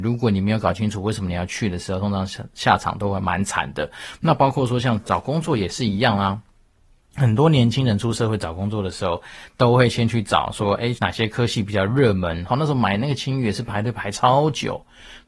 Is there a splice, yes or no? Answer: yes